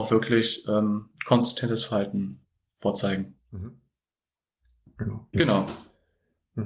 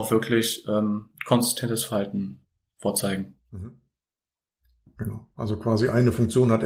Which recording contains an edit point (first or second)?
first